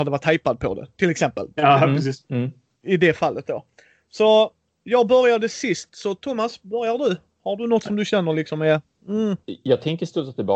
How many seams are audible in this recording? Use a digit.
1